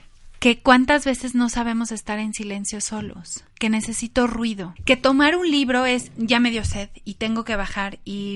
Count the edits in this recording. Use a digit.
2